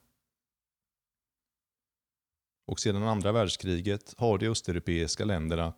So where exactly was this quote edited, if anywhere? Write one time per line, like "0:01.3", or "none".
0:02.5